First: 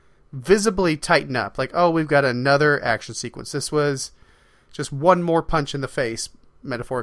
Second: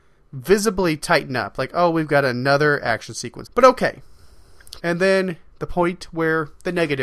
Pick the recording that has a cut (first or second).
second